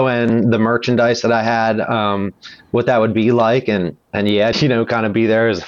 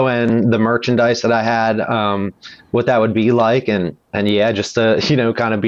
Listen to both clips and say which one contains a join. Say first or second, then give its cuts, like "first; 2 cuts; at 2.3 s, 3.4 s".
first; 1 cut; at 4.5 s